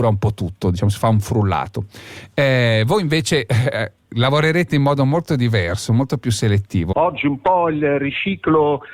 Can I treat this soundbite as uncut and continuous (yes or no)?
no